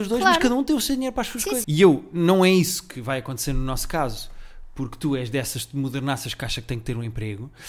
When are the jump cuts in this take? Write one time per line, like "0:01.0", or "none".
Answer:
0:01.6